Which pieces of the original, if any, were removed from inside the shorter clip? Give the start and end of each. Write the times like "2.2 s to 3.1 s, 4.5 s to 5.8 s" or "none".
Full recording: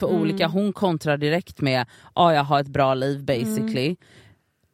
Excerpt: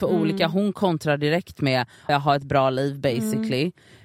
2.1 s to 2.3 s